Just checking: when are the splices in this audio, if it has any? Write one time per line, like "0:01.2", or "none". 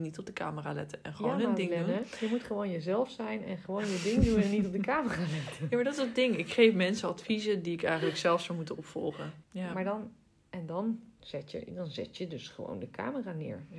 0:09.4